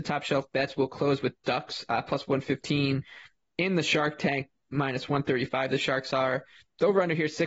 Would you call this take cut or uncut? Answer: uncut